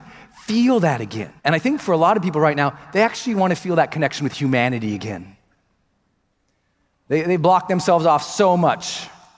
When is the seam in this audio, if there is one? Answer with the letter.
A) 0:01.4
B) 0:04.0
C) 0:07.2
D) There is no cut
A